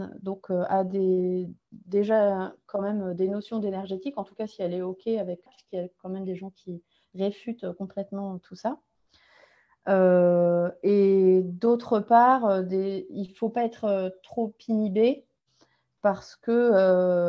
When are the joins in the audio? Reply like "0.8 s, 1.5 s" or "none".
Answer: 5.5 s